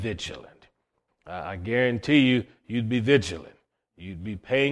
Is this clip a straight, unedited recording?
no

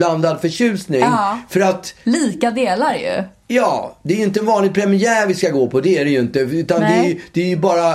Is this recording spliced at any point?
no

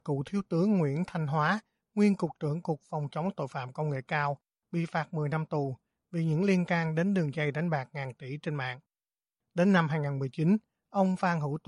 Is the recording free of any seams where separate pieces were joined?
yes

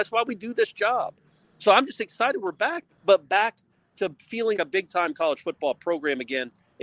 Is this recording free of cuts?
no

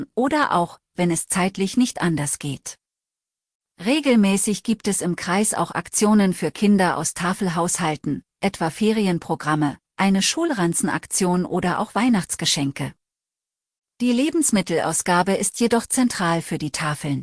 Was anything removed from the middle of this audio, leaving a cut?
no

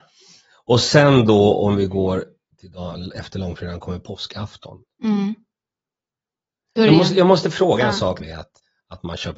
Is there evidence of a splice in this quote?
yes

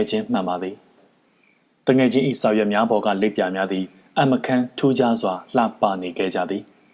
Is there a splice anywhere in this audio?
no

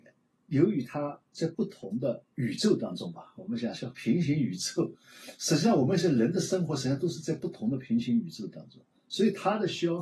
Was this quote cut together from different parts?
no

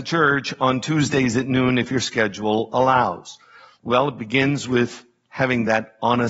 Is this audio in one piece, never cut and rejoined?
no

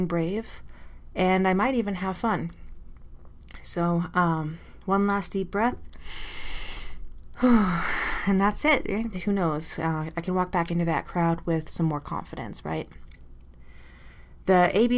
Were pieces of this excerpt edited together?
yes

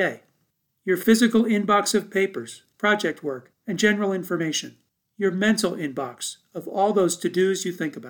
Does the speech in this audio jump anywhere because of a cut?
yes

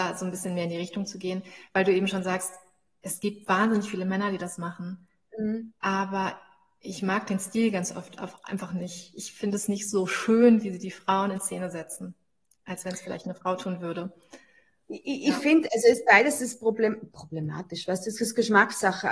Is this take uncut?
no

